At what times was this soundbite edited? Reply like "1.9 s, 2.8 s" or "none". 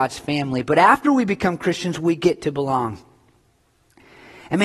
none